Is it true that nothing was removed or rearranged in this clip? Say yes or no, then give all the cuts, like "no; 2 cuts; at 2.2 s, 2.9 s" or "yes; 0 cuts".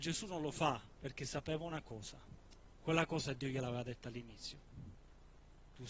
no; 2 cuts; at 1.0 s, 2.7 s